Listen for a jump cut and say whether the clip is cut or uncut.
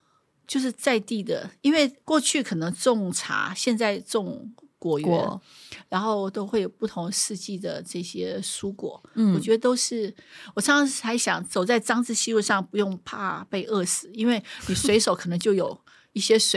uncut